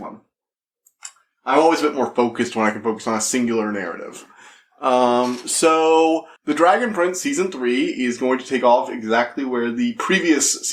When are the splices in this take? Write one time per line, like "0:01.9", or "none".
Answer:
0:06.4